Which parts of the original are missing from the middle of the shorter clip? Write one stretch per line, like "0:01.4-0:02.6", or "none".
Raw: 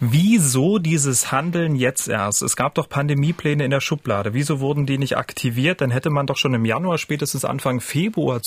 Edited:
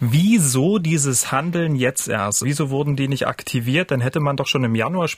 0:02.4-0:04.3